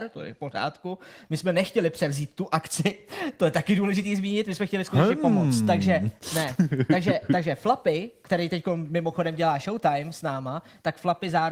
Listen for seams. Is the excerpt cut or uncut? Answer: uncut